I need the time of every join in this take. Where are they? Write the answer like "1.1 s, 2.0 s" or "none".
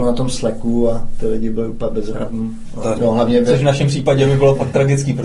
3.0 s